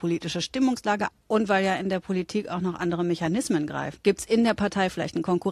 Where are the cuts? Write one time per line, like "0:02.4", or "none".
0:01.1
0:04.0